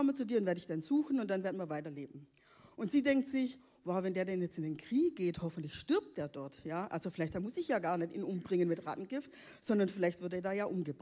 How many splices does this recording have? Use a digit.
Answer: 0